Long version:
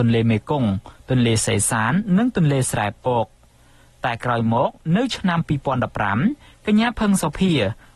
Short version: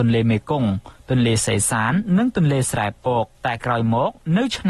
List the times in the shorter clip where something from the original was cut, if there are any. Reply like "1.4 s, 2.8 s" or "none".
3.3 s